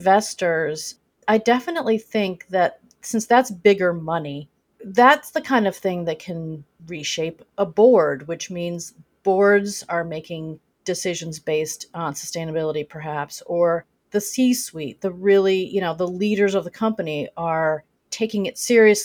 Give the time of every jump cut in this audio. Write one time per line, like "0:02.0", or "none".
none